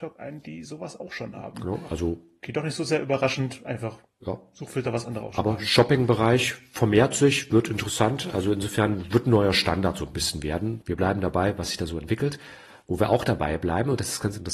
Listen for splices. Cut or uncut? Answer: cut